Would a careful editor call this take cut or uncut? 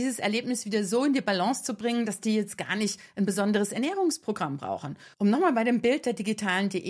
cut